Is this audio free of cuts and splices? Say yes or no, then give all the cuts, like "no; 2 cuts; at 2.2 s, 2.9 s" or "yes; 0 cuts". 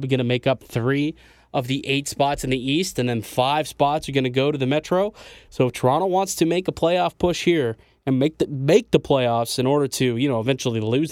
yes; 0 cuts